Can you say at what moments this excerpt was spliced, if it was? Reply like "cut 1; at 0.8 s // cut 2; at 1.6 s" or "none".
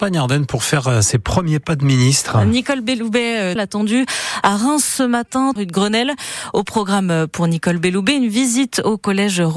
cut 1; at 3.6 s // cut 2; at 5.6 s